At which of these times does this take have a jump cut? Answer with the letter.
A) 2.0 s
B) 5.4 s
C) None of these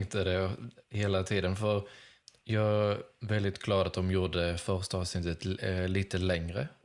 C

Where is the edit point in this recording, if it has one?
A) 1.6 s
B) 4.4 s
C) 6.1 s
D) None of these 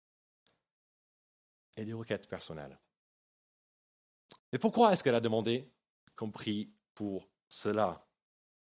B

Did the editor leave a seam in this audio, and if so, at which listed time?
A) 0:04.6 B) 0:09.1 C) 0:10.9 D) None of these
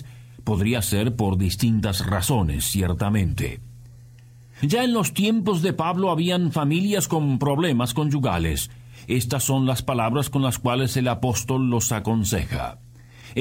A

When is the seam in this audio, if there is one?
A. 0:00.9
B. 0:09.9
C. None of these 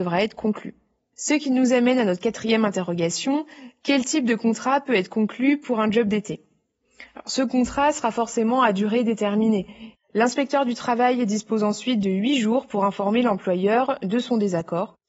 B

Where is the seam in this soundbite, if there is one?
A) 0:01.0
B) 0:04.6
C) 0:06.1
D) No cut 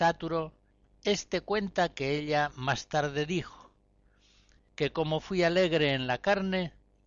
B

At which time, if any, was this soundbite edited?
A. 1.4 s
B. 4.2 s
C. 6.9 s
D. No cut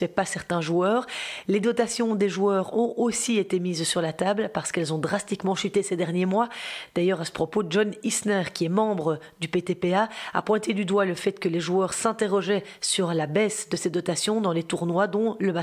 D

